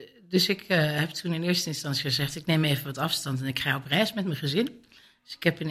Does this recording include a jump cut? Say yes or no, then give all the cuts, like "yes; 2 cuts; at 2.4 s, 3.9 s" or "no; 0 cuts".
no; 0 cuts